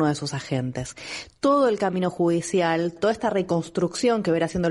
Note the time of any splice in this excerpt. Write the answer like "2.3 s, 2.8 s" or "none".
3.0 s